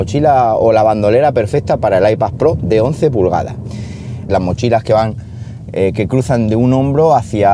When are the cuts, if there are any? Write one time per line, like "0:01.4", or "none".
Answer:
0:04.3